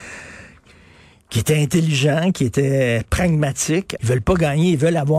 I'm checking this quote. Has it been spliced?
yes; 1 cut; at 4.0 s

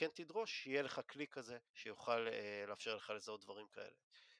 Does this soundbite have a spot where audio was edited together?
yes; 1 cut; at 1.7 s

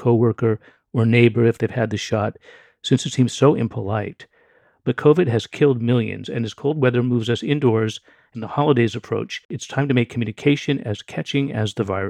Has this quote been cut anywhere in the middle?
no; 0 cuts

